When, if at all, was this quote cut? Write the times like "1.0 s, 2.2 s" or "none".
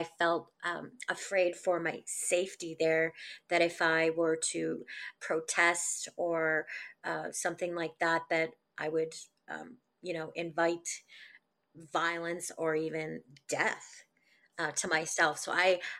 5.2 s